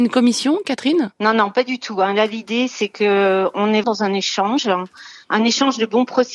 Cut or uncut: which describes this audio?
cut